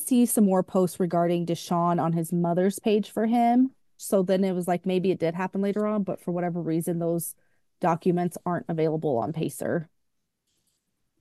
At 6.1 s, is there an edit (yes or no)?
no